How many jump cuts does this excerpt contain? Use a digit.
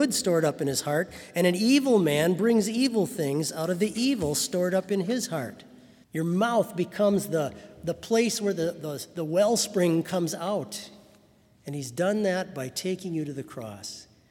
2